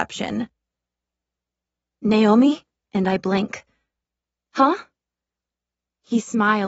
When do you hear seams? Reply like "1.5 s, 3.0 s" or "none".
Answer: 2.8 s